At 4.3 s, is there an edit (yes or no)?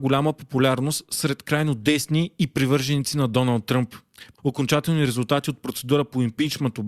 yes